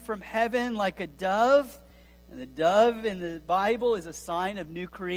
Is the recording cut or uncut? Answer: uncut